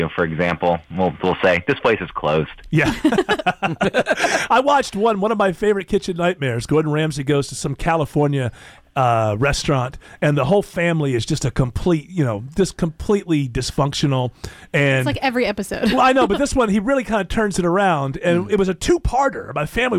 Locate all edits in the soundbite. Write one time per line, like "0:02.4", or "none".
none